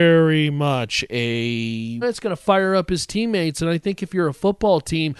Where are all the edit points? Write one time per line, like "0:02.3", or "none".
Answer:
0:02.0

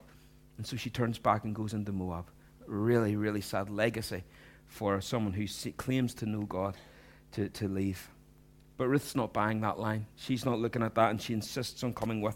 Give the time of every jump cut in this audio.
none

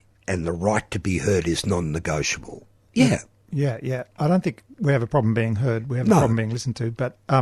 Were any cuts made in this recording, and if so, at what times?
none

